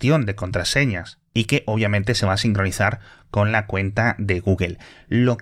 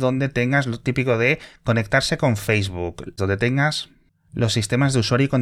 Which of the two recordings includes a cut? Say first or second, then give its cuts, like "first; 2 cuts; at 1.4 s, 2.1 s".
second; 1 cut; at 3.2 s